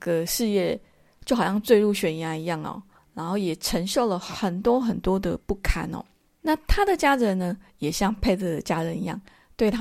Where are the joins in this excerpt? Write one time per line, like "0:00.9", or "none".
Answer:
0:03.0
0:06.2